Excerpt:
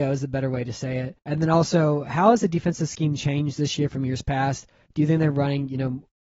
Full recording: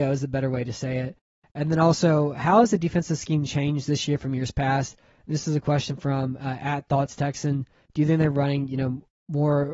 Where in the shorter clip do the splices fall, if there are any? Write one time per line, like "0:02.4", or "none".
0:01.2
0:04.8